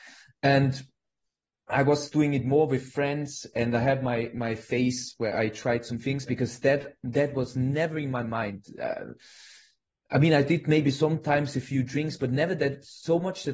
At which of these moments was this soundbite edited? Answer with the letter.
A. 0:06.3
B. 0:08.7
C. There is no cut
A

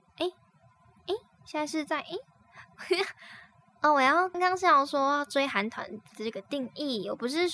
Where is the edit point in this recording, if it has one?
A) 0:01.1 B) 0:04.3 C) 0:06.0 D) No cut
B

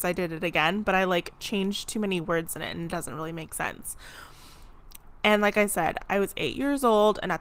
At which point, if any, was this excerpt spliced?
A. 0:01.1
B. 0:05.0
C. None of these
B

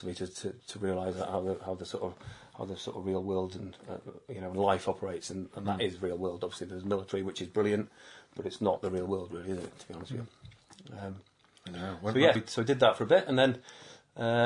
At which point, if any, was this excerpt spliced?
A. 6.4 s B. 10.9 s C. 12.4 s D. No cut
C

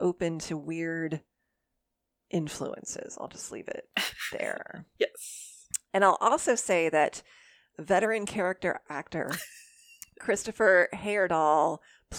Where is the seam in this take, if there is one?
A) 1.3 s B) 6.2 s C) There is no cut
C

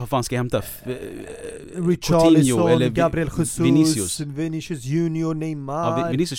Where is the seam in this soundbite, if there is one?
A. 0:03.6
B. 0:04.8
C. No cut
C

